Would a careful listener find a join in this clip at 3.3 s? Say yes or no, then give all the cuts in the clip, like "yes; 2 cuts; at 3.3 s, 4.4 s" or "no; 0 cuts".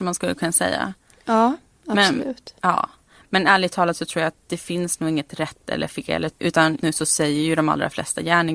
no; 1 cut; at 6.8 s